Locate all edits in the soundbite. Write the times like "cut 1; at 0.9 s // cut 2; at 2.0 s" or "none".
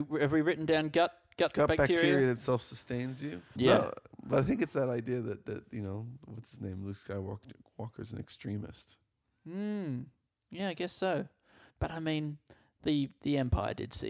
cut 1; at 3.6 s